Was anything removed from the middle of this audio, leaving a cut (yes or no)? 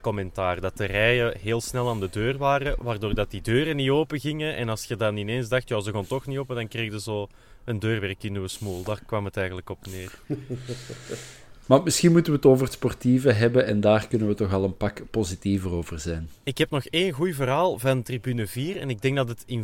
yes